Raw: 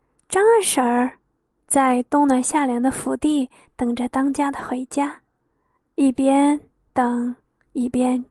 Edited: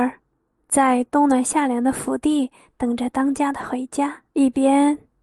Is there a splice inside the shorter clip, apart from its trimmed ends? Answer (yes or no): yes